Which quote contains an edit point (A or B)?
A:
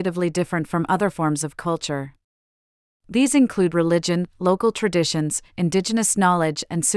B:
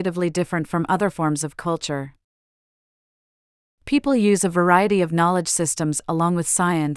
A